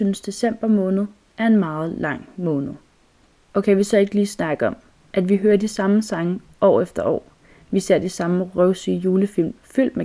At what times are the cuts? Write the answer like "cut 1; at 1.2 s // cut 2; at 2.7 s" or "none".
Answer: cut 1; at 3.4 s